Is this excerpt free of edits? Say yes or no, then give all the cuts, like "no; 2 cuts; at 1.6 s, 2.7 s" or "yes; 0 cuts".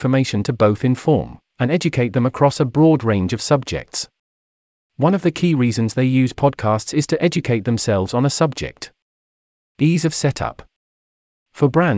no; 1 cut; at 9.6 s